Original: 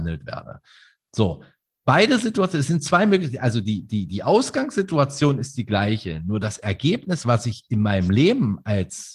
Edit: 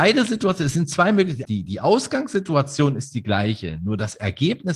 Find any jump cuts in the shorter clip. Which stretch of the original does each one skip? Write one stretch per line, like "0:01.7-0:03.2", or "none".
0:03.4-0:03.9